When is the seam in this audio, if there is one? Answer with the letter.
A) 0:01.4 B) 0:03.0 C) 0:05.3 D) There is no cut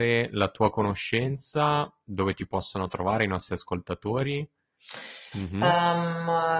C